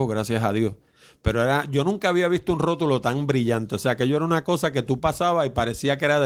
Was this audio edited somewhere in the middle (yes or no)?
no